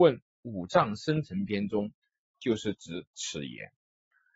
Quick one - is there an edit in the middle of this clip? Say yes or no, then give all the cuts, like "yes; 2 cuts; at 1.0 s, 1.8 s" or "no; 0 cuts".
yes; 1 cut; at 2.3 s